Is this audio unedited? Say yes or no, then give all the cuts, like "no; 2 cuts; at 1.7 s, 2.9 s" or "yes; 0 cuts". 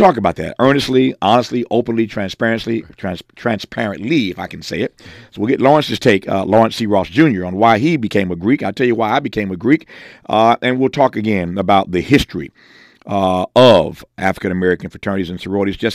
yes; 0 cuts